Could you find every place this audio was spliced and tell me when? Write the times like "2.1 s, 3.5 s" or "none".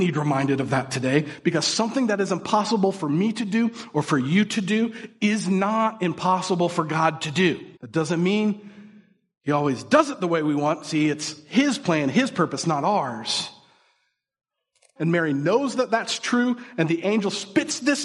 7.8 s, 15.0 s